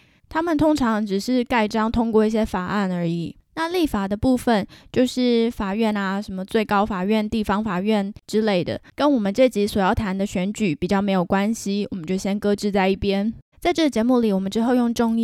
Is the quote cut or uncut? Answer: cut